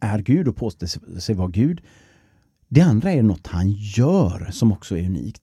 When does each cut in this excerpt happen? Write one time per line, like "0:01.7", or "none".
none

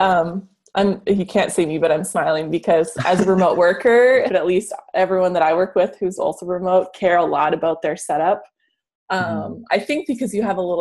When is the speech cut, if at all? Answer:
0:04.3

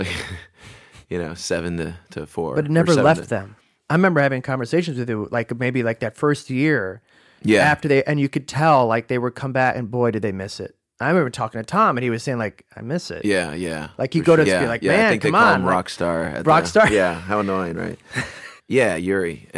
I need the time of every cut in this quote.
0:14.4
0:18.6

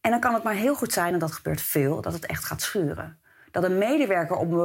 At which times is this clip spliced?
none

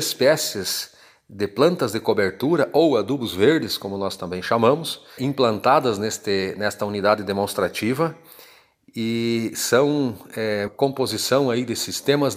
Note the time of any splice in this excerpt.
0:05.2
0:10.7

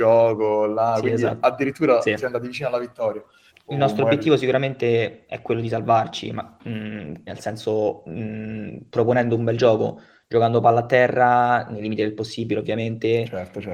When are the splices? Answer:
0:03.5
0:07.3

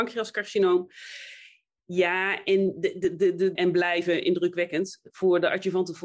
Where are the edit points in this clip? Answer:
0:03.6

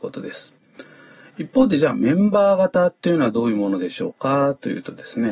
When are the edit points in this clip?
none

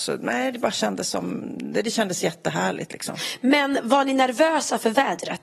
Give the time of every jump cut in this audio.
none

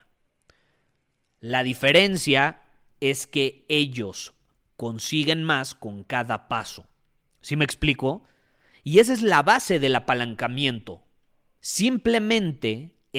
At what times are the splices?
0:11.6

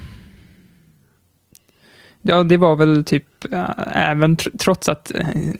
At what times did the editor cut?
none

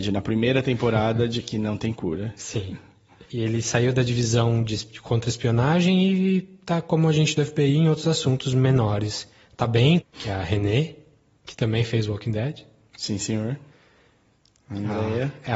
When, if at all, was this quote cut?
0:10.0

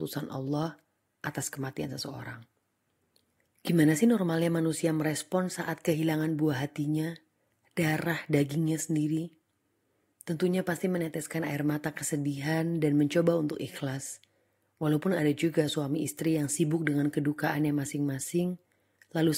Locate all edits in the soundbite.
none

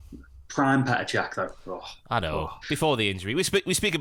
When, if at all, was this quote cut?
0:02.6

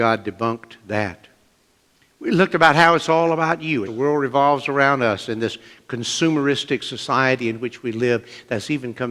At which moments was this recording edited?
0:03.9

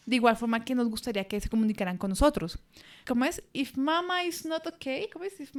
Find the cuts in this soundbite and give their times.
0:03.0

